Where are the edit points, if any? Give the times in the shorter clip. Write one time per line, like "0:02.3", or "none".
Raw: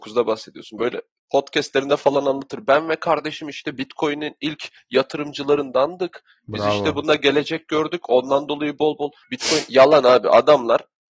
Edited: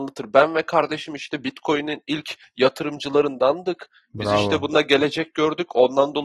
none